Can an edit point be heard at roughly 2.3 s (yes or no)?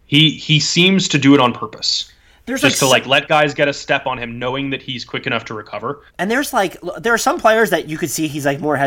no